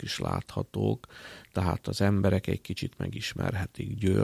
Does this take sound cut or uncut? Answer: uncut